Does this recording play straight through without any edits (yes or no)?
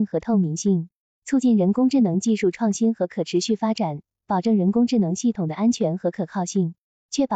yes